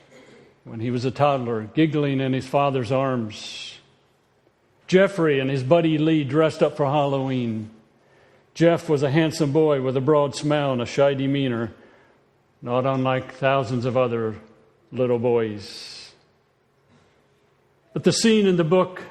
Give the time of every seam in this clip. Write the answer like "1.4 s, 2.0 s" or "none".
4.8 s